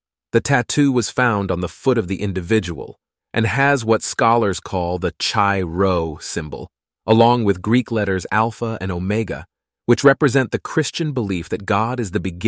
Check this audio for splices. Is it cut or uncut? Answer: cut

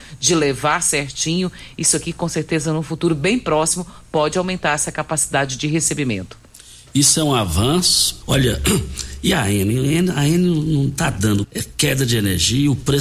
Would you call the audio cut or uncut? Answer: cut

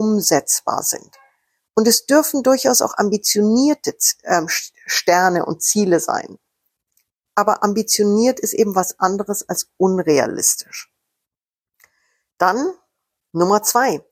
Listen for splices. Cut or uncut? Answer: uncut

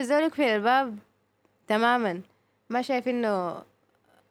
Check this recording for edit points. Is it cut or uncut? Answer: uncut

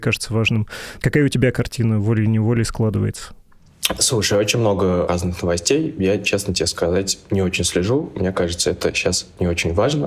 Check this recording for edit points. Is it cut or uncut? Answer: uncut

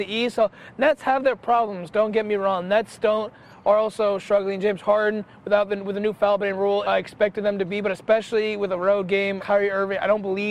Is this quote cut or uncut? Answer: cut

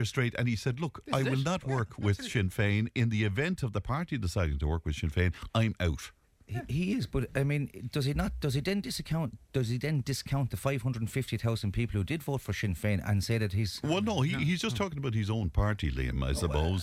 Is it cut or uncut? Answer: uncut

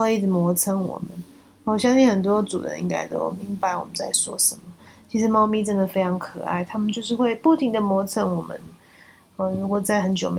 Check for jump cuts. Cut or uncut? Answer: uncut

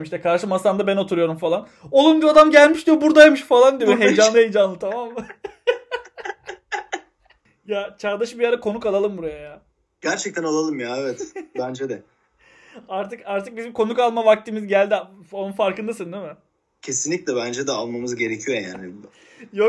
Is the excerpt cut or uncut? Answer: uncut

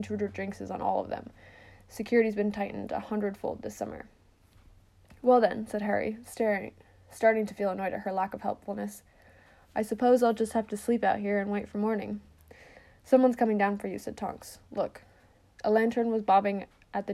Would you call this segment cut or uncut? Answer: uncut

